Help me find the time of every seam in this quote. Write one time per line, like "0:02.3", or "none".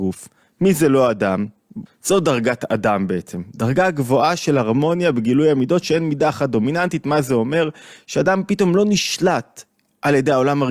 0:01.9